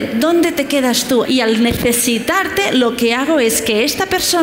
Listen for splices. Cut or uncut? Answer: cut